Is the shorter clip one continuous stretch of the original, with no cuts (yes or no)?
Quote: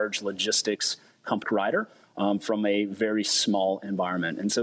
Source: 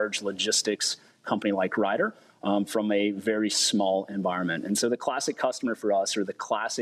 no